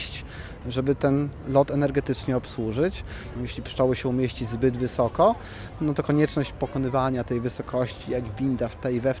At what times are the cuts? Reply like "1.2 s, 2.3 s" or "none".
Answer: 3.3 s

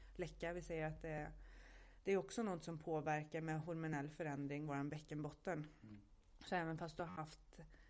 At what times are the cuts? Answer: none

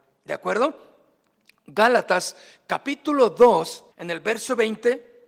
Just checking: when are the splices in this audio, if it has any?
3.9 s

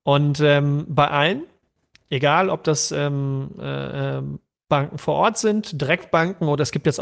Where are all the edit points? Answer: none

